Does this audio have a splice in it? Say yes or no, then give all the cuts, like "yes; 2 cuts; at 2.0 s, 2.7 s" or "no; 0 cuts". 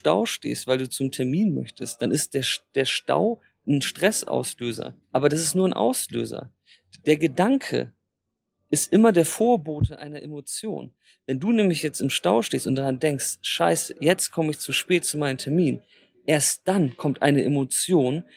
yes; 1 cut; at 5.0 s